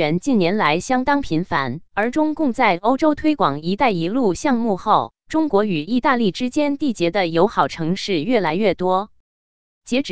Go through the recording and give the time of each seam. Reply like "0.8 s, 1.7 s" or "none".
1.9 s